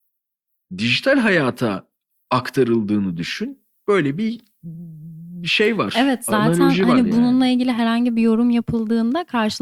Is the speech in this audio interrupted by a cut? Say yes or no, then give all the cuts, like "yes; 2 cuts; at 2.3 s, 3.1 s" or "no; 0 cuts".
no; 0 cuts